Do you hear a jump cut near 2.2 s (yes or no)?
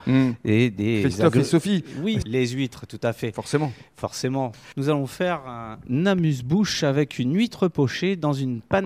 yes